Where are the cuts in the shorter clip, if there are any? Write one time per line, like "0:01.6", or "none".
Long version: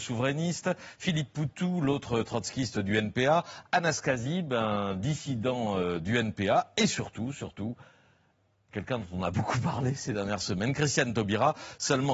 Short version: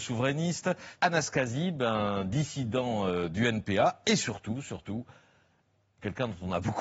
0:01.0

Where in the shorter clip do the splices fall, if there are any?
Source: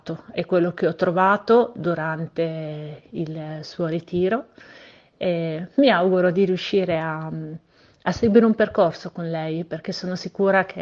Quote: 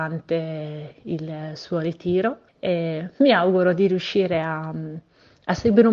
0:02.5

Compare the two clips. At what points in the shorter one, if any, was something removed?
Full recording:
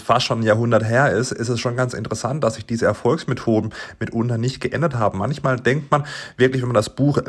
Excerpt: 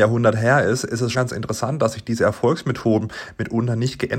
0:01.1

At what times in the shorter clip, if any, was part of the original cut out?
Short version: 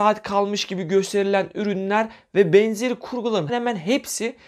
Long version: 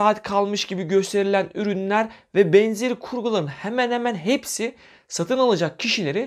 0:03.5

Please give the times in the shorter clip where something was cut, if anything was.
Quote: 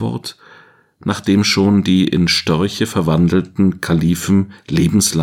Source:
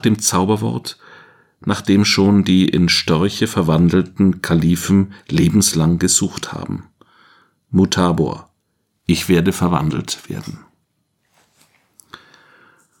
none

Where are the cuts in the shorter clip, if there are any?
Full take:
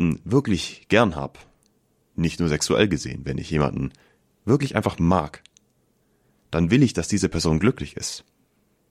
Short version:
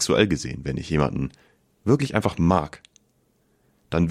none

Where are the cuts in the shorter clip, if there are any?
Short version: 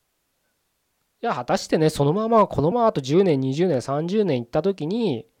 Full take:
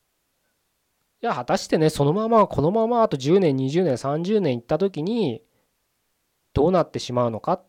0:02.7

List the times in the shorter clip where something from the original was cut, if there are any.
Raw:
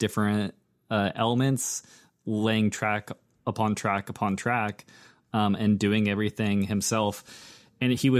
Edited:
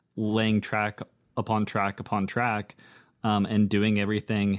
none

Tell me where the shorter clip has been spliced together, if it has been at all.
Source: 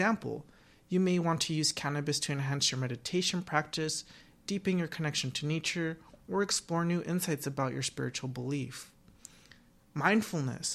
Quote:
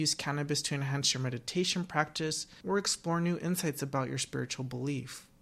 0:02.6

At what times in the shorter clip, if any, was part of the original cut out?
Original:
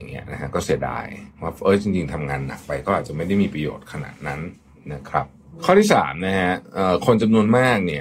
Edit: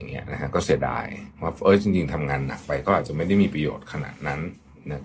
none

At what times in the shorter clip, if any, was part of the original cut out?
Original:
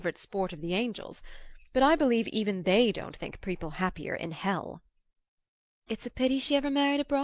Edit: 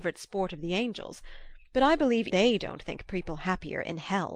0:02.3

